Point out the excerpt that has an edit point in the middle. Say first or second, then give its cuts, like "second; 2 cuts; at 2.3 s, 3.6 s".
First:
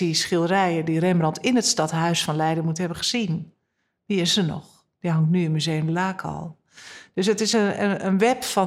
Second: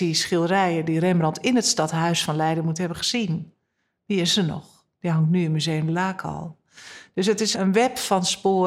second; 1 cut; at 7.5 s